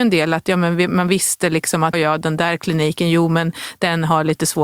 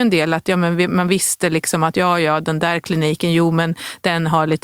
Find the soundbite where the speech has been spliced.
first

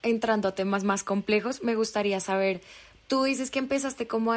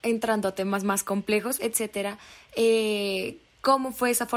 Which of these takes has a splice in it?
second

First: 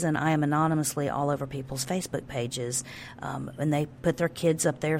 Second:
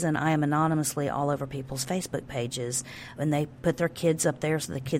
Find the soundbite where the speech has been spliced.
second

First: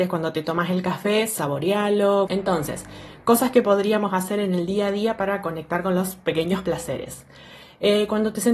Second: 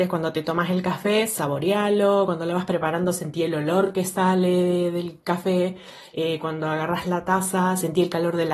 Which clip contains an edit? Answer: first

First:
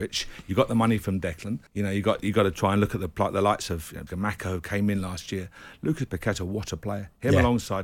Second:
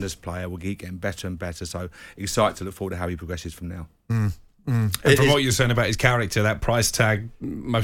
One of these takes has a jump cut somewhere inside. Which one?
first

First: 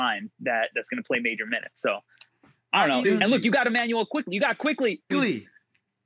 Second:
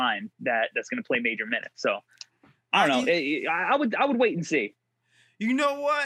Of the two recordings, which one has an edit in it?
first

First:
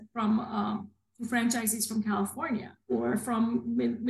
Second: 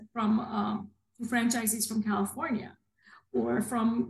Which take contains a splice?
first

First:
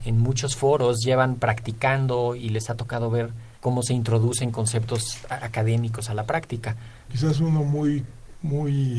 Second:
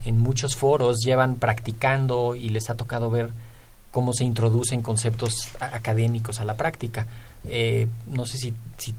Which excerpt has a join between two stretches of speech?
first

